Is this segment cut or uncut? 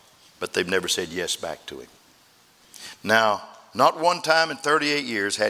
uncut